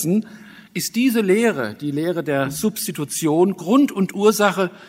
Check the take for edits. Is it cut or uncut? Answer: uncut